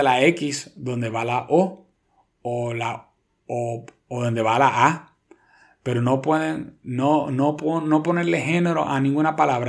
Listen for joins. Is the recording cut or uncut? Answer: uncut